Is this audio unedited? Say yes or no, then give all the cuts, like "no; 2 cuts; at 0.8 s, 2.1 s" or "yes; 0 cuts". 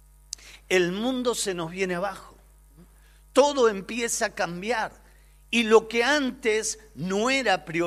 yes; 0 cuts